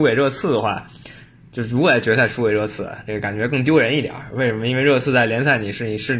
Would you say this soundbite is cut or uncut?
uncut